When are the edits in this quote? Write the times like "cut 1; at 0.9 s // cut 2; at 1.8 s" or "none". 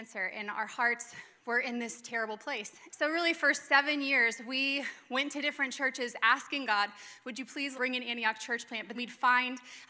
cut 1; at 2.9 s // cut 2; at 7.7 s // cut 3; at 8.9 s